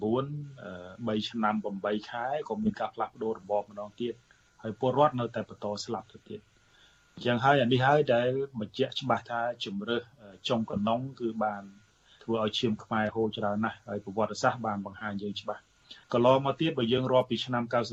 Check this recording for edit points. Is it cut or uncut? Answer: cut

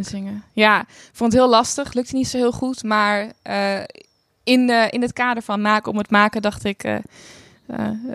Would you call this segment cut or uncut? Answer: uncut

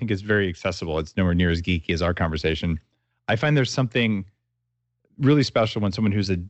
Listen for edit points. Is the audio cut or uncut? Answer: uncut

